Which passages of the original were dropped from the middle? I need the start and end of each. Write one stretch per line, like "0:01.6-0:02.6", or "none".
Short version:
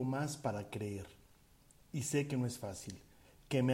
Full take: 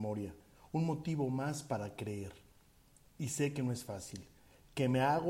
none